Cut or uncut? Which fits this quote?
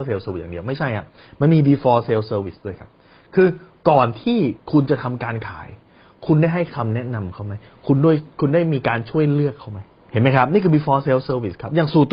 uncut